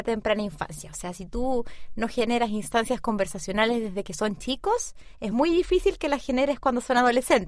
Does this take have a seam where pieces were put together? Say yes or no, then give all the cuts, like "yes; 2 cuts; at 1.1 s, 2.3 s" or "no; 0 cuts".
no; 0 cuts